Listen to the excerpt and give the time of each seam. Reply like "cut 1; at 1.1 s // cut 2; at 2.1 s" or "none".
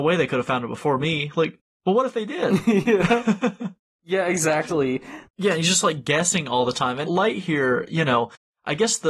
cut 1; at 5.2 s // cut 2; at 7.0 s